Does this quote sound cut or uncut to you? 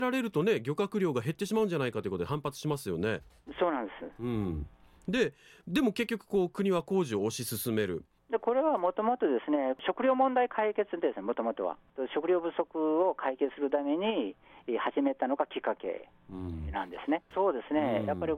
cut